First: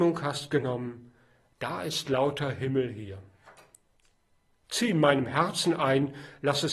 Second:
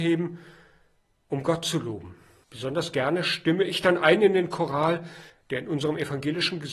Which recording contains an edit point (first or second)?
second